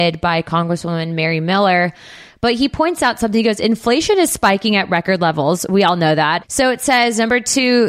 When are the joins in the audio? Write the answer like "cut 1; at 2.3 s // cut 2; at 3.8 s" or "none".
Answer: cut 1; at 6.4 s